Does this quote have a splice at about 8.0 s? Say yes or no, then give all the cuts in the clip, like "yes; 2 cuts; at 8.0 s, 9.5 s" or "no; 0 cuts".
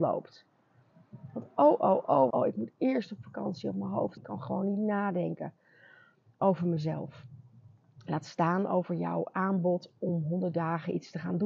no; 2 cuts; at 2.3 s, 4.2 s